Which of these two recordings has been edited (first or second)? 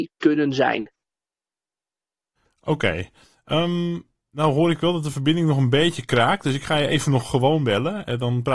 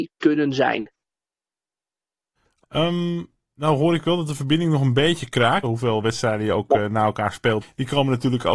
second